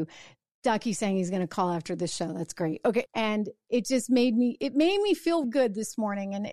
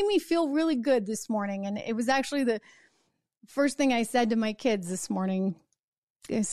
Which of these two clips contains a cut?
first; 2 cuts; at 3.1 s, 5.4 s

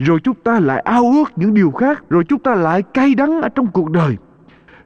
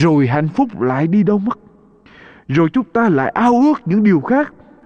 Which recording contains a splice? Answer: first; 1 cut; at 2.1 s

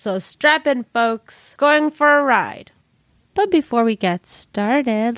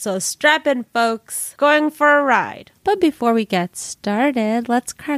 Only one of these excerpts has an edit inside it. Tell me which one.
second; 1 cut; at 2.8 s

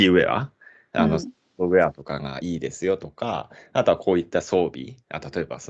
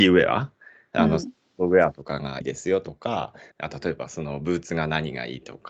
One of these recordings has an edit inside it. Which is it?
second; 2 cuts; at 2.4 s, 3.5 s

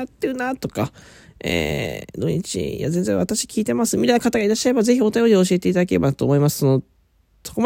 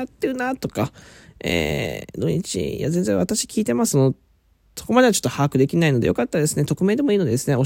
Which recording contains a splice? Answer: second; 1 cut; at 3.9 s

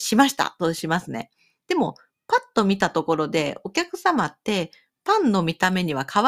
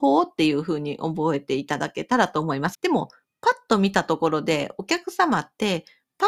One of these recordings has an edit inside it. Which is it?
second; 1 cut; at 2.7 s

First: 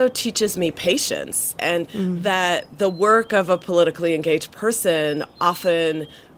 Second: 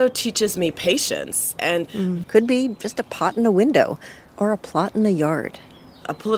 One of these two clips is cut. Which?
second; 1 cut; at 2.2 s

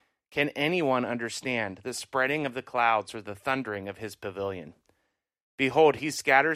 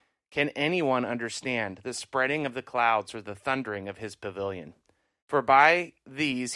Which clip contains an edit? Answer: second; 1 cut; at 5.2 s

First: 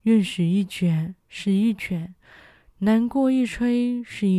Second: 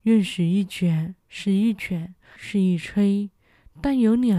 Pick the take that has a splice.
second; 1 cut; at 2.4 s

